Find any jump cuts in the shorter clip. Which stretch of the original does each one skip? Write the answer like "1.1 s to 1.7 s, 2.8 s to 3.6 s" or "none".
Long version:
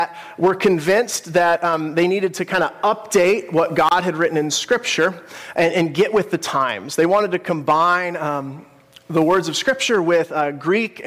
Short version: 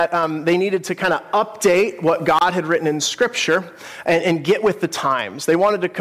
none